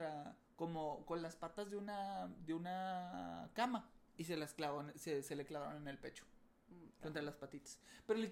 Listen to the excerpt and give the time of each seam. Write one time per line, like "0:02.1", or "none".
0:04.1